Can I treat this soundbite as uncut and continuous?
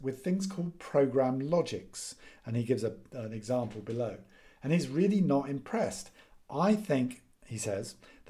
yes; 0 cuts

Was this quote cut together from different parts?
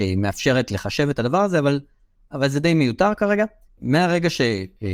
yes; 1 cut; at 3.7 s

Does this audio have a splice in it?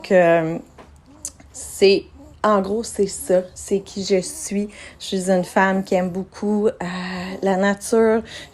no; 0 cuts

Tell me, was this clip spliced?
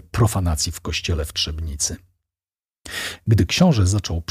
no; 0 cuts

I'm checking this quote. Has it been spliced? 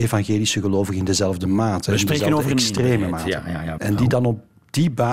yes; 1 cut; at 3.8 s

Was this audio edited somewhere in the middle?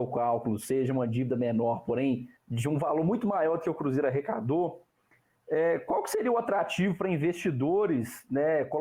yes; 1 cut; at 2.4 s

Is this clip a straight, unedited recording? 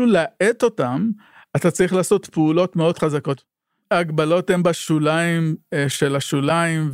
yes; 0 cuts

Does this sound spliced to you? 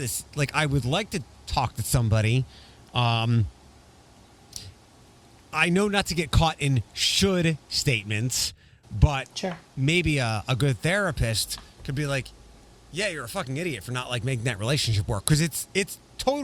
no; 0 cuts

